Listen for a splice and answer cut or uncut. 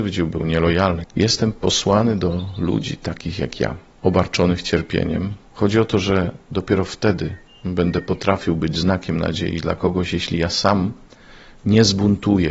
cut